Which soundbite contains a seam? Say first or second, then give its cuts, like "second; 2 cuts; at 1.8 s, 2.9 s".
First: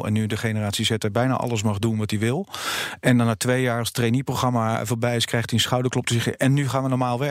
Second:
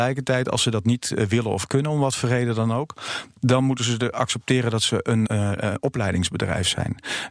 second; 1 cut; at 5.3 s